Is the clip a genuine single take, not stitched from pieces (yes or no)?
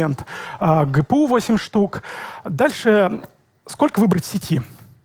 yes